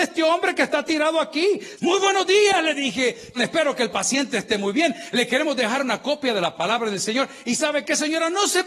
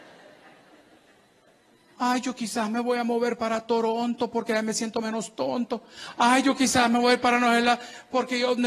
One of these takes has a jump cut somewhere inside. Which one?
first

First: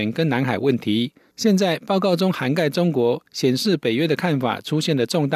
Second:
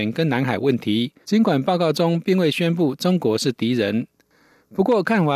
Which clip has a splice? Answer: second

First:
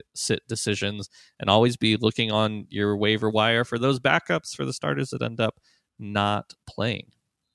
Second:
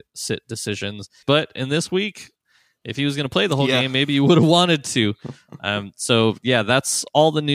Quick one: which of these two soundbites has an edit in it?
second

